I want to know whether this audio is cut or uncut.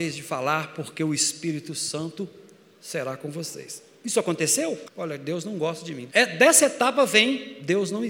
cut